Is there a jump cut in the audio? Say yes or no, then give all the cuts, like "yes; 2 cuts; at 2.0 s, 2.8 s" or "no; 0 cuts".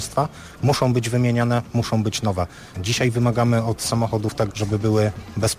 yes; 2 cuts; at 2.7 s, 4.5 s